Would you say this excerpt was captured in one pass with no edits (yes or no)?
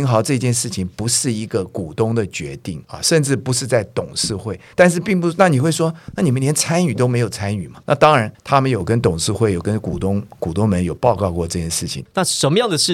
yes